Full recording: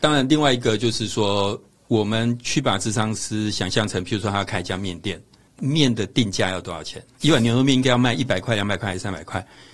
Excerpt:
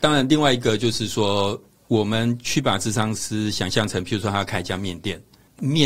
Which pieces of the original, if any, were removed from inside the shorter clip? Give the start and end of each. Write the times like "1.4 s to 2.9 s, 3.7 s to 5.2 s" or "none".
none